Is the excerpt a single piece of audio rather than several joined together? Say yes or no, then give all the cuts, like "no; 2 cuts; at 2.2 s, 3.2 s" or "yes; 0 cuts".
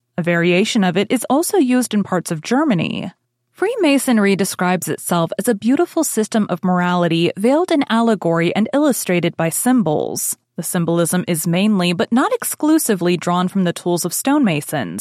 yes; 0 cuts